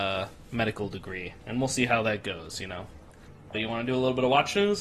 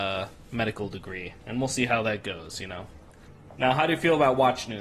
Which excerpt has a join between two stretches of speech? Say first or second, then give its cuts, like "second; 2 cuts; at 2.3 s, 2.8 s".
first; 1 cut; at 3.5 s